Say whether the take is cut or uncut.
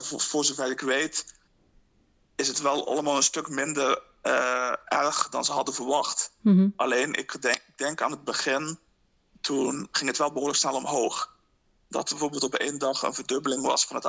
uncut